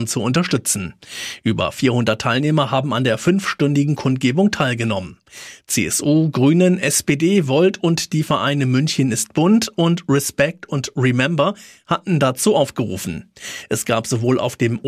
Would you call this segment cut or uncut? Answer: uncut